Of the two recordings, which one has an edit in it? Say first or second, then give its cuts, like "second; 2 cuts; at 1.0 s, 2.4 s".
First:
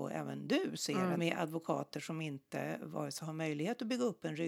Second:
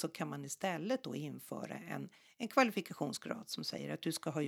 first; 1 cut; at 1.1 s